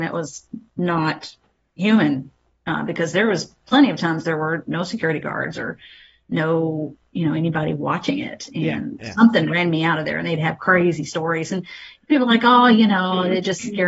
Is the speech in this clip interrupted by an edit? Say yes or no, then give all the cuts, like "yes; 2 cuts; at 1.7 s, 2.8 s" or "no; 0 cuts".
no; 0 cuts